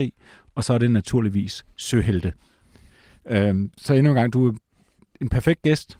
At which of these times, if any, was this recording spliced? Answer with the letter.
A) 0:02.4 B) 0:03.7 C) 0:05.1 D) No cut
B